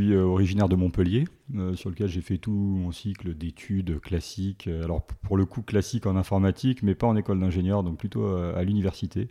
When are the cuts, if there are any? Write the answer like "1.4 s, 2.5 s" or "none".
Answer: none